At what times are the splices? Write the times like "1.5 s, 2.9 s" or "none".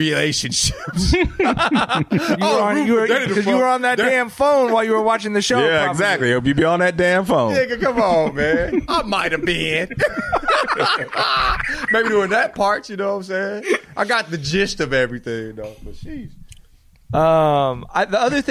none